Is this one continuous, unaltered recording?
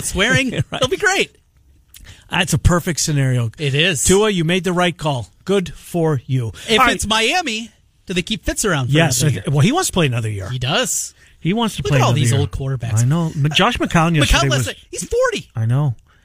yes; 0 cuts

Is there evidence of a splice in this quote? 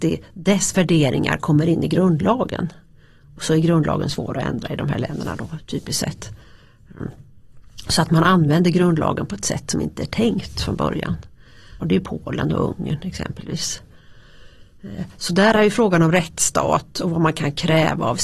yes; 1 cut; at 11.8 s

